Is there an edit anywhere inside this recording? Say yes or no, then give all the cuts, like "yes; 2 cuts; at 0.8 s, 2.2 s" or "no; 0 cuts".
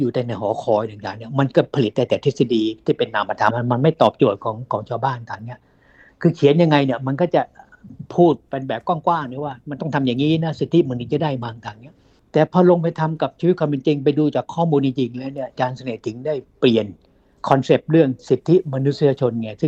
yes; 1 cut; at 3.5 s